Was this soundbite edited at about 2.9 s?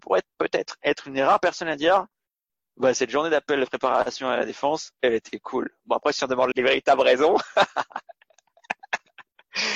no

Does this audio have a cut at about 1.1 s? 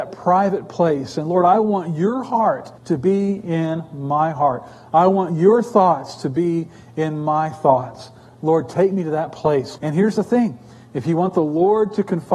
no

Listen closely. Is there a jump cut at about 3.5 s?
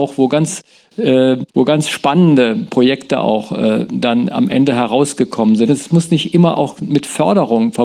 no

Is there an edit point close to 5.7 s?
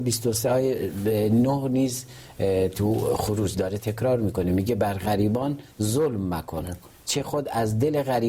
yes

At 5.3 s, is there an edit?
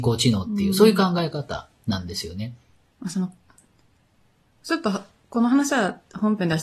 no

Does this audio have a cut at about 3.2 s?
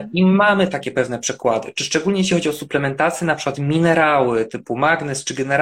no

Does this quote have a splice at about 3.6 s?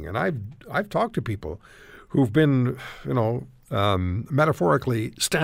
no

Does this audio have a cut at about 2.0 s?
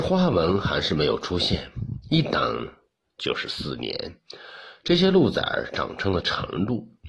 yes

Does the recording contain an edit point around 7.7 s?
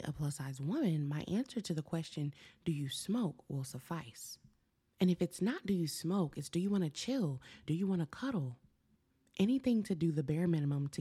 yes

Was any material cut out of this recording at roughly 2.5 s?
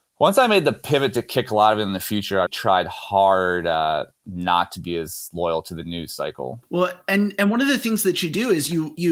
yes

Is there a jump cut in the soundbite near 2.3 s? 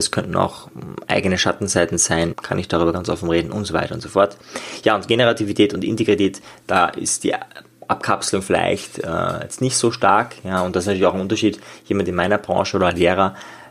yes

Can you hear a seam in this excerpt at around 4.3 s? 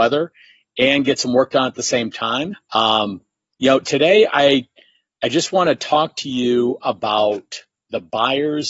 no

